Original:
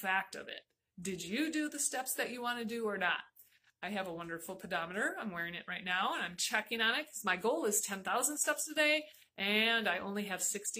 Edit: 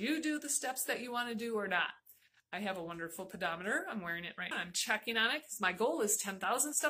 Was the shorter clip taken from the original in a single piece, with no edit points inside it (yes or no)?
no